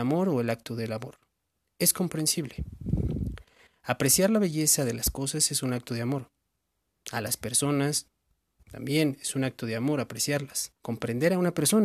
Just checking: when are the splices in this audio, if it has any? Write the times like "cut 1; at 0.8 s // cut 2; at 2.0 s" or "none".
cut 1; at 10.8 s